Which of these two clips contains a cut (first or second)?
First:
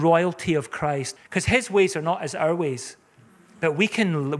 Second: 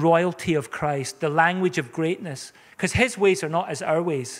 first